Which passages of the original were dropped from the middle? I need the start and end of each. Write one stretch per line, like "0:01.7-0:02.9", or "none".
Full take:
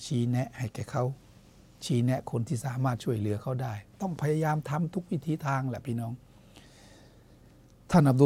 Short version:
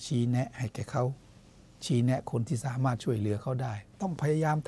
none

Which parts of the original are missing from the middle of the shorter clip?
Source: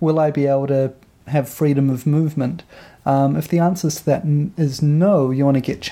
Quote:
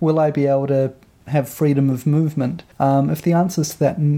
0:02.7-0:03.0

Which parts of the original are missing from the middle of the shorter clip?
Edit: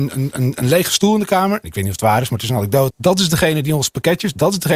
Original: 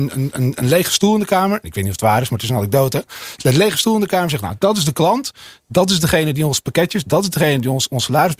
0:02.9-0:05.6

